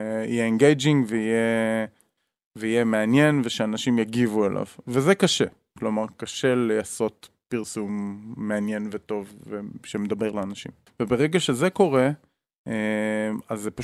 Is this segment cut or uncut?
cut